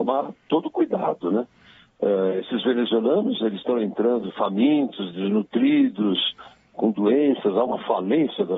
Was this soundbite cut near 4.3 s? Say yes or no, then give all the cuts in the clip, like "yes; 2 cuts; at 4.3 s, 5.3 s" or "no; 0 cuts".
yes; 1 cut; at 4.3 s